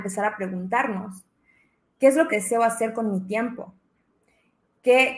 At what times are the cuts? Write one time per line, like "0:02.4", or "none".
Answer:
0:02.3